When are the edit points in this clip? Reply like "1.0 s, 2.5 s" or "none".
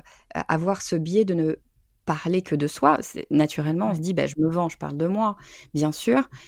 none